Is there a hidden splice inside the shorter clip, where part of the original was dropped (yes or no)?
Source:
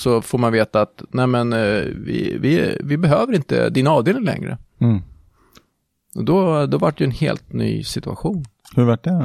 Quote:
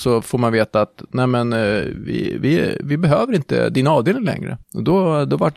yes